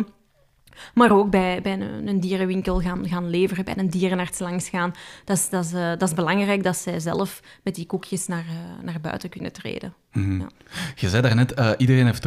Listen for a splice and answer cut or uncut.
uncut